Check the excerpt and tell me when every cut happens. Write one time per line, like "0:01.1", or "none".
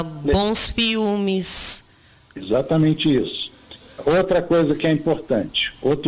none